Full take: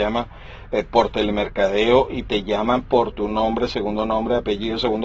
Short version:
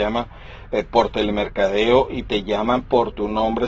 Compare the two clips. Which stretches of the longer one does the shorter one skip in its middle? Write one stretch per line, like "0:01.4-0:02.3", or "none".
none